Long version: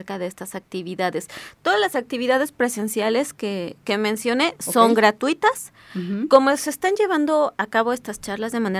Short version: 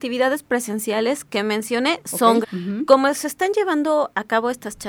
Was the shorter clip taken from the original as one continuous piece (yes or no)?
no